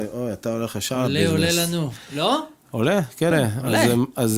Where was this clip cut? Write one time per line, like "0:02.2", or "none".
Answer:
0:03.3